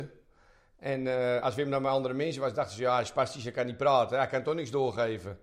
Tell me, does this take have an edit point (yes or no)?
no